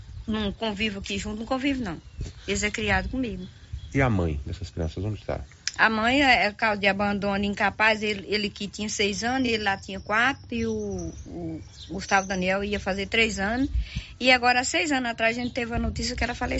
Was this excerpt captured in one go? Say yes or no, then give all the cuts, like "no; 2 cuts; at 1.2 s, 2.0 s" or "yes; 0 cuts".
yes; 0 cuts